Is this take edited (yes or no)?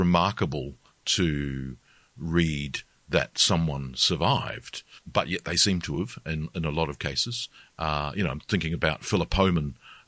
no